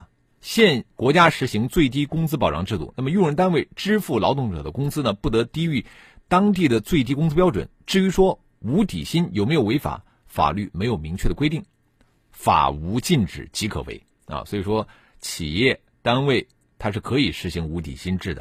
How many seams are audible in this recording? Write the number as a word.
zero